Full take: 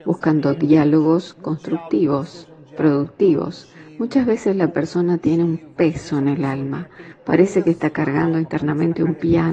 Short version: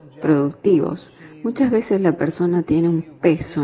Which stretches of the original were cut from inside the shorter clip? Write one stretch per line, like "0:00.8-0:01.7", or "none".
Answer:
none